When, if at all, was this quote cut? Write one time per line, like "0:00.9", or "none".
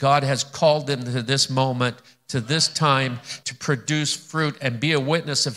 0:03.4